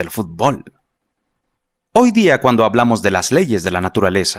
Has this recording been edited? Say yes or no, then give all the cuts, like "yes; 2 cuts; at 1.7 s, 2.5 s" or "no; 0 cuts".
yes; 1 cut; at 1.9 s